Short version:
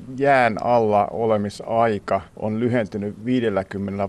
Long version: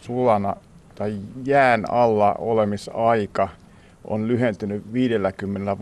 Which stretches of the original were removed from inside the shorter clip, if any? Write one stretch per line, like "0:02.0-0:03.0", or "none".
0:03.6-0:04.0